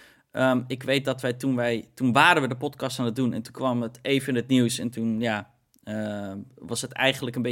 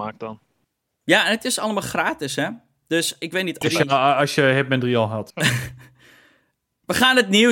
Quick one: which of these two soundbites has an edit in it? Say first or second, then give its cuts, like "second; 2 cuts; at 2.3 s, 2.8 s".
second; 2 cuts; at 3.6 s, 5.3 s